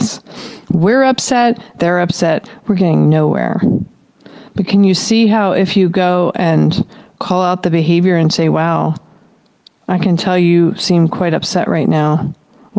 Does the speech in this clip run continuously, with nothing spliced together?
yes; 0 cuts

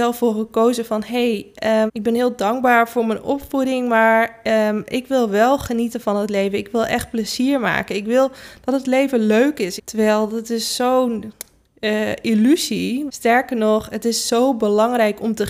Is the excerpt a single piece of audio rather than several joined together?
no; 3 cuts; at 1.9 s, 9.8 s, 13.1 s

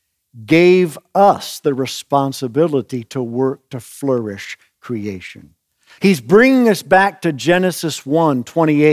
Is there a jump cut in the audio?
yes; 1 cut; at 6.0 s

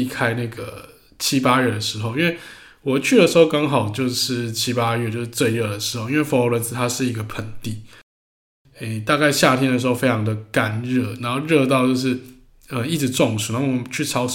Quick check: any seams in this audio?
no; 0 cuts

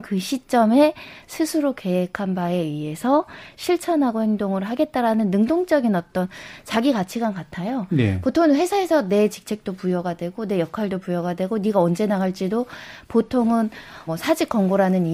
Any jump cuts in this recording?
yes; 1 cut; at 14.1 s

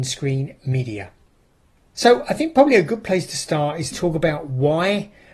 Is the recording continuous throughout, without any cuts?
no; 2 cuts; at 1.9 s, 3.9 s

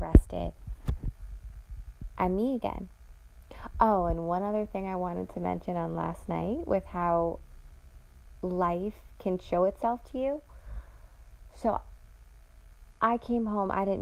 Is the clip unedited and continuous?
yes; 0 cuts

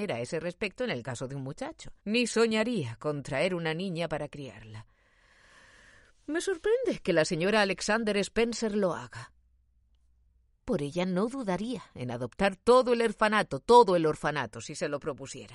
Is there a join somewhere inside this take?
yes; 1 cut; at 2.0 s

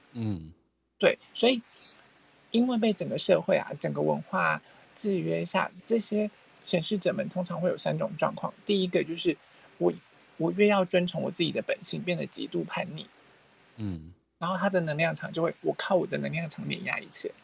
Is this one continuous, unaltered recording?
yes; 0 cuts

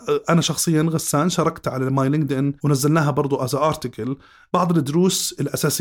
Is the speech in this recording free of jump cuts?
no; 1 cut; at 2.6 s

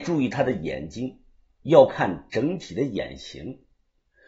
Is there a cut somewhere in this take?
no; 0 cuts

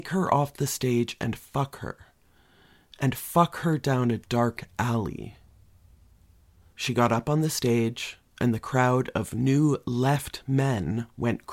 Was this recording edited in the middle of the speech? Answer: yes; 1 cut; at 6.7 s

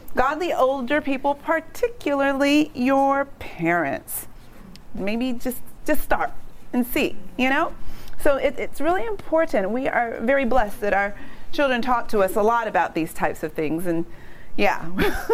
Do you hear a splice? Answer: yes; 1 cut; at 5.0 s

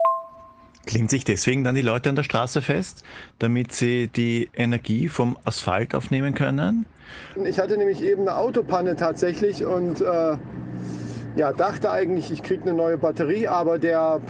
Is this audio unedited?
no; 1 cut; at 7.4 s

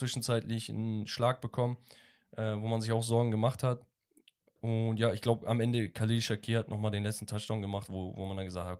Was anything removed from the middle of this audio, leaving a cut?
no; 0 cuts

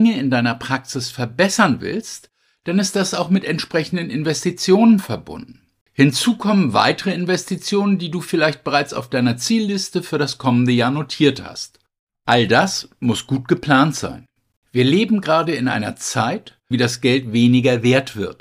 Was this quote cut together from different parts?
yes; 2 cuts; at 14.5 s, 16.7 s

